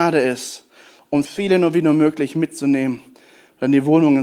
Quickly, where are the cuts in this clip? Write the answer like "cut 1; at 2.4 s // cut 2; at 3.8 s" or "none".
cut 1; at 1.2 s